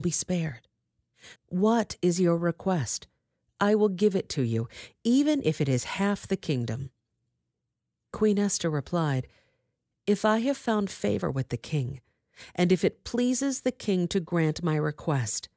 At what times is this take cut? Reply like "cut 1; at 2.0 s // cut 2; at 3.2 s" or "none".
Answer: cut 1; at 1.4 s